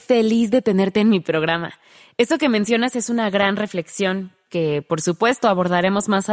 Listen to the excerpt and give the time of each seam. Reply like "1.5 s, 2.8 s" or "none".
none